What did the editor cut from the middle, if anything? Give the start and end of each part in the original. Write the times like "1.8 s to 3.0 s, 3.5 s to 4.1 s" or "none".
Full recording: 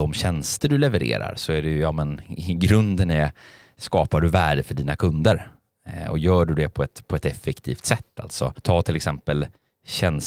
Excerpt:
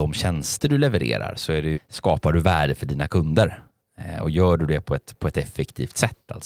1.7 s to 3.6 s